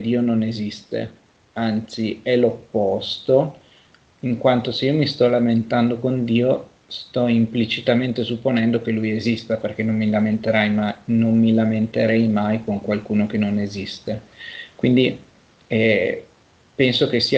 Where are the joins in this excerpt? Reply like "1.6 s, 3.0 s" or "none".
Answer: none